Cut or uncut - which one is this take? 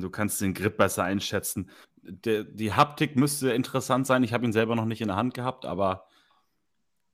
cut